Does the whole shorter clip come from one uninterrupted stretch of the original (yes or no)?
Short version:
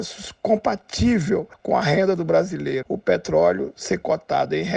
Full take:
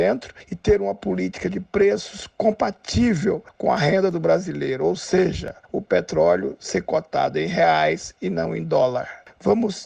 no